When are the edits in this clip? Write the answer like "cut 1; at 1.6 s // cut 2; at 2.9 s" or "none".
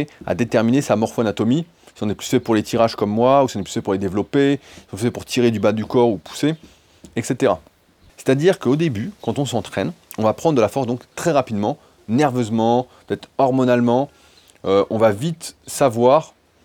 cut 1; at 8.1 s